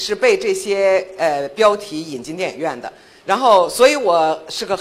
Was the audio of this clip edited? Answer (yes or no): no